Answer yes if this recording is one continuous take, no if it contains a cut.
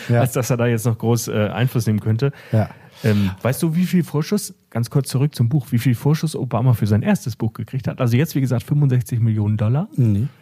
yes